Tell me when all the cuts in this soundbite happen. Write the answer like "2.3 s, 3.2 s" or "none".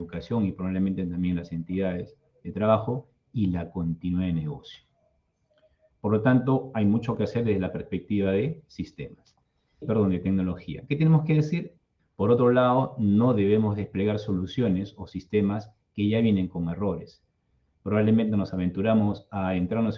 9.8 s, 12.0 s